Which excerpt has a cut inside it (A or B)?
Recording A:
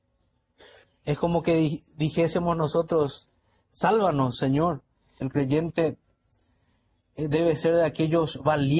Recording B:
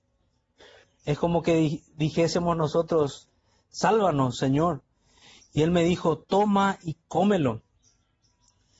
A